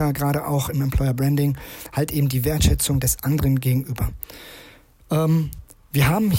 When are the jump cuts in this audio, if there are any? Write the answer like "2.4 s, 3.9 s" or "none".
none